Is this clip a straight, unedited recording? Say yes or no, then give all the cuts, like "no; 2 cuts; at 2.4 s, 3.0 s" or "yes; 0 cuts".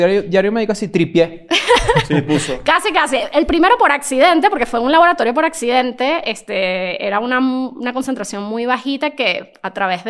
yes; 0 cuts